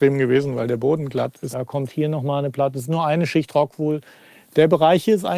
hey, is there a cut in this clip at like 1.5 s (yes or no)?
yes